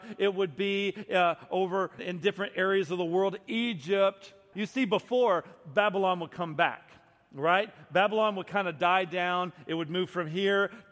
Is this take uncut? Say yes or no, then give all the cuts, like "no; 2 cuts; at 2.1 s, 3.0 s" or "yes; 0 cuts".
no; 2 cuts; at 2.0 s, 4.5 s